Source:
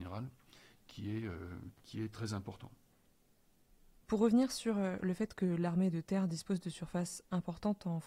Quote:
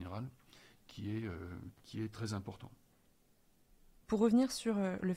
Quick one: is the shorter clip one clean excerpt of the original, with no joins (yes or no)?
yes